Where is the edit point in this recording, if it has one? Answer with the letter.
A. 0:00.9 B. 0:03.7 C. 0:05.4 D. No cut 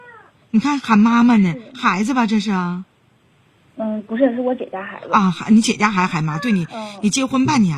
D